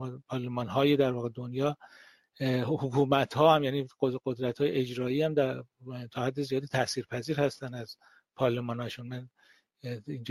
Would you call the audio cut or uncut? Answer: uncut